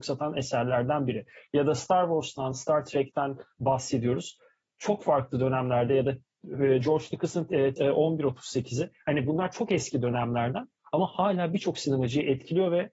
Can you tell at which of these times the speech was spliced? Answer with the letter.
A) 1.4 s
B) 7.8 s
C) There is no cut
B